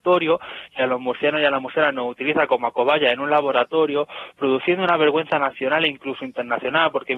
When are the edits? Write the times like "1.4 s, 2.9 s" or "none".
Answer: none